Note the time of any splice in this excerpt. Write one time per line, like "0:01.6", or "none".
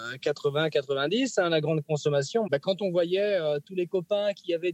0:02.5